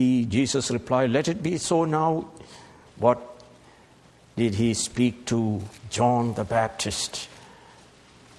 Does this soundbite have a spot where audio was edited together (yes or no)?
yes